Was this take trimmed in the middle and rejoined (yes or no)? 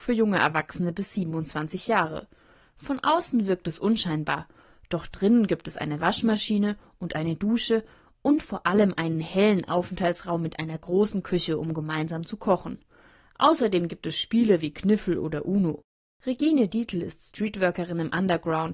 no